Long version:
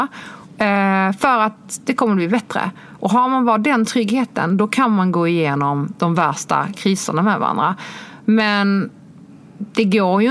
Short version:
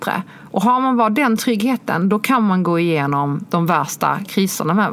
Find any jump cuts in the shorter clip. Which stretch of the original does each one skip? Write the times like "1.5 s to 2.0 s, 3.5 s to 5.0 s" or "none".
none